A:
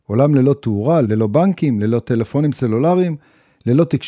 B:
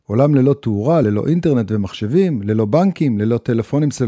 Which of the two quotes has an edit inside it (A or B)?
A